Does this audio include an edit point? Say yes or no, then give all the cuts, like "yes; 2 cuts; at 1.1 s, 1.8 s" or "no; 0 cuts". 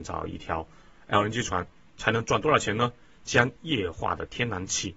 yes; 1 cut; at 3.2 s